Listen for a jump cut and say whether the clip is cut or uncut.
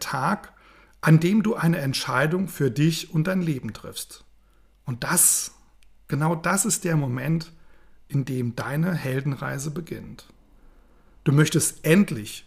uncut